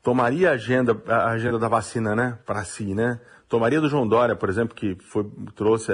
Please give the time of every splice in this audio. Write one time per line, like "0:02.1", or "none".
none